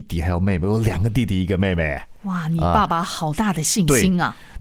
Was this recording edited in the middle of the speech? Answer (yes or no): no